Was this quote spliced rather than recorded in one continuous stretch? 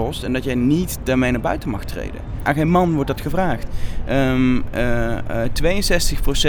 yes; 1 cut; at 2.4 s

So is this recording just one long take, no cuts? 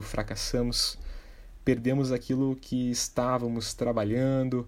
yes; 0 cuts

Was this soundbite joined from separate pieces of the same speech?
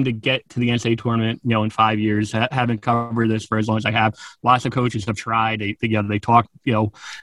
no; 0 cuts

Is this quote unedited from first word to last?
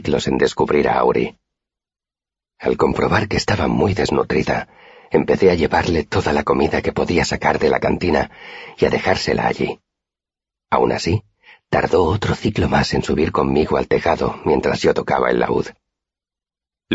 yes; 0 cuts

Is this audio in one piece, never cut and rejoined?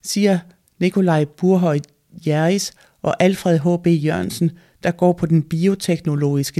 yes; 0 cuts

